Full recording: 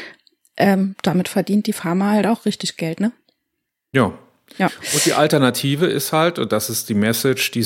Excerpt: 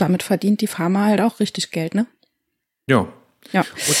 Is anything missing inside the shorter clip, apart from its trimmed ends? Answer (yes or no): no